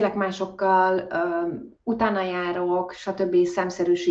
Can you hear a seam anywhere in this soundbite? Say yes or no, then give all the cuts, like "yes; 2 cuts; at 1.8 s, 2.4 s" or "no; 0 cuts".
no; 0 cuts